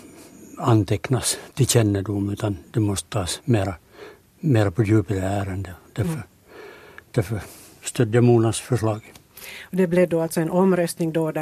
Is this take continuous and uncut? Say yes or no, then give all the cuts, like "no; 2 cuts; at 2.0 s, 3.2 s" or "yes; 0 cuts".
yes; 0 cuts